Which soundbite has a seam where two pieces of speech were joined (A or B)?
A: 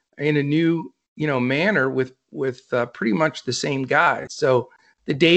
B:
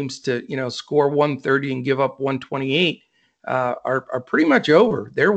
A